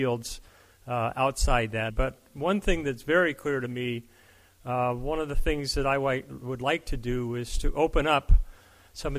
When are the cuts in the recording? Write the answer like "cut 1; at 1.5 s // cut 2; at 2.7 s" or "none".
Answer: cut 1; at 1.9 s